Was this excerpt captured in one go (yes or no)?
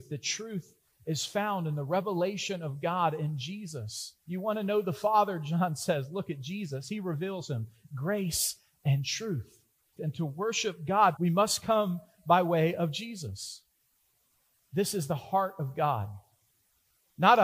no